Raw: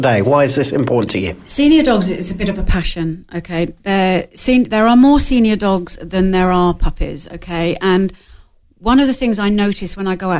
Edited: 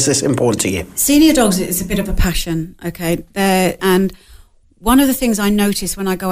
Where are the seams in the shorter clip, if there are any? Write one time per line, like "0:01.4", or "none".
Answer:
0:03.8